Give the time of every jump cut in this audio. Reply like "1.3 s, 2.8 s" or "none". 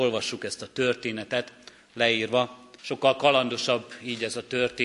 2.8 s